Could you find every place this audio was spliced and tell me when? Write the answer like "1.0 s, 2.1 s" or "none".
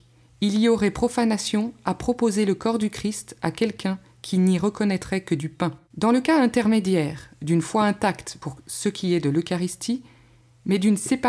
5.8 s